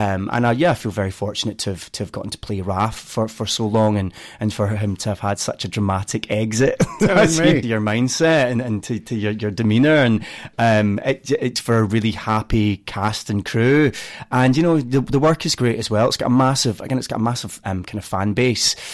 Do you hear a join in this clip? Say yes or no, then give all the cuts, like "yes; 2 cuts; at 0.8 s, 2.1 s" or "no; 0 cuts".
yes; 1 cut; at 7.6 s